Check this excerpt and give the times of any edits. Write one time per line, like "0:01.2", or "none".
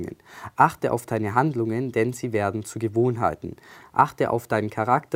0:03.8